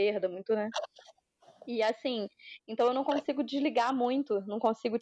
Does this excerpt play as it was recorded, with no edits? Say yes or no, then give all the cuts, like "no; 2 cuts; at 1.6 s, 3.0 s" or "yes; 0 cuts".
yes; 0 cuts